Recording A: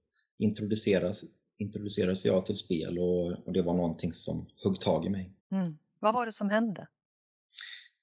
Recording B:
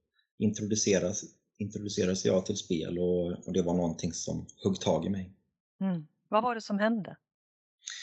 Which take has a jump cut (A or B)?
A